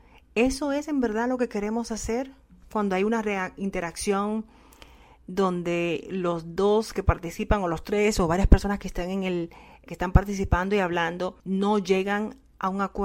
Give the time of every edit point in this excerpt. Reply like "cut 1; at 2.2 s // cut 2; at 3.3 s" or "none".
cut 1; at 9.9 s // cut 2; at 11.4 s